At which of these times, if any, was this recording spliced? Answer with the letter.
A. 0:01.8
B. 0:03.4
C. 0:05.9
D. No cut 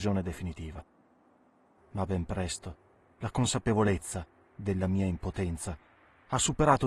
A